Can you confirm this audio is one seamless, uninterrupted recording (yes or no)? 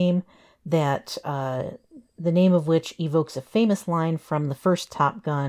yes